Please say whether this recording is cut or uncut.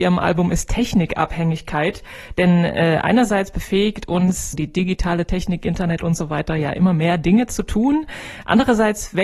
cut